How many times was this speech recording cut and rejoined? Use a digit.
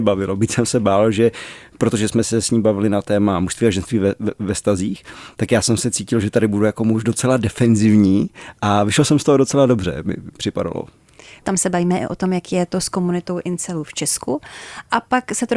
1